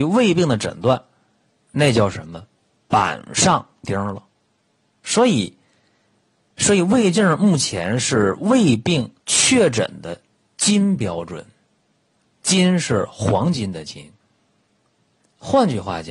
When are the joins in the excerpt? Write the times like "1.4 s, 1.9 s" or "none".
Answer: 3.8 s, 6.5 s, 9.2 s

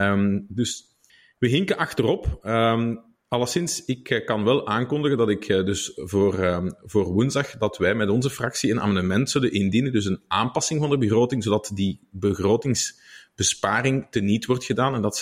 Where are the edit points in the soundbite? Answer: none

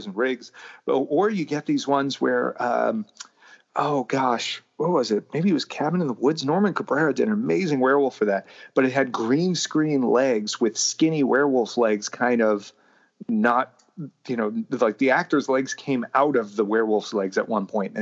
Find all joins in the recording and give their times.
none

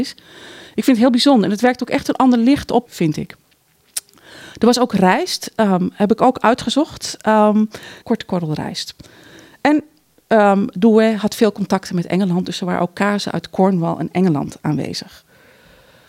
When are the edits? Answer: 2.9 s, 8.0 s

